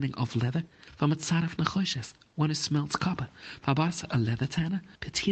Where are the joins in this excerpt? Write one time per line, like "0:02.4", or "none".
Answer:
none